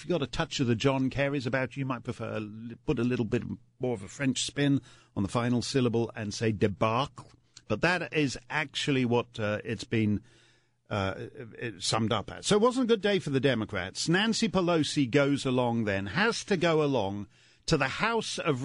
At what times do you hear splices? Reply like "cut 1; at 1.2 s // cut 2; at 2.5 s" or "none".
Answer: none